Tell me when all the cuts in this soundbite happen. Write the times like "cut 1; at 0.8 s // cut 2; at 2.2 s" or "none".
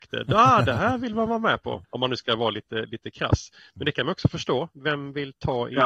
cut 1; at 1.8 s